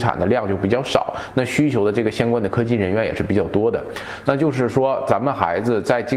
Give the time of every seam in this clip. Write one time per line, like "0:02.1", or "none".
0:04.2